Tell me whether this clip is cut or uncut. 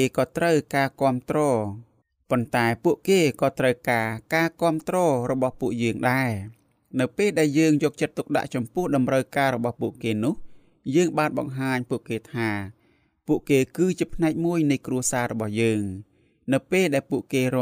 uncut